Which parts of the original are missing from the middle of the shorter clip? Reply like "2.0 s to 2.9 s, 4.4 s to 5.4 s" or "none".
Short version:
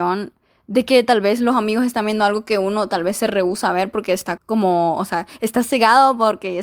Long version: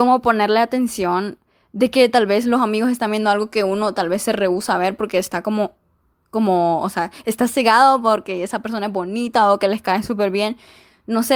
5.4 s to 6.2 s